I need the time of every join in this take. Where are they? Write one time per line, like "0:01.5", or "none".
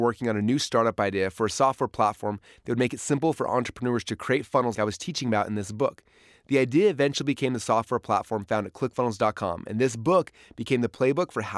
0:04.7